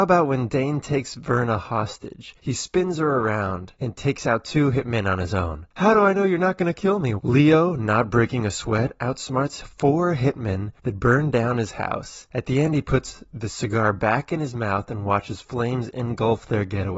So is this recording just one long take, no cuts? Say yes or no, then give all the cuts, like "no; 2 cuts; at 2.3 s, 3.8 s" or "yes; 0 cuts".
no; 1 cut; at 7.2 s